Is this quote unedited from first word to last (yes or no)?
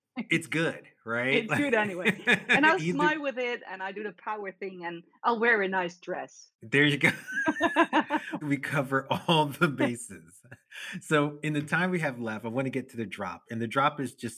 yes